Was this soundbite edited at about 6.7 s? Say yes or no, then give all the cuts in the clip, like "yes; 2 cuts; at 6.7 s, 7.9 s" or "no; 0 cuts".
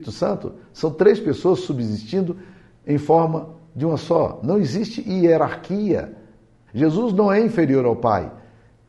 yes; 1 cut; at 6.7 s